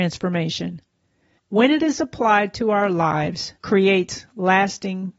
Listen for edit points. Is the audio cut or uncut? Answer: cut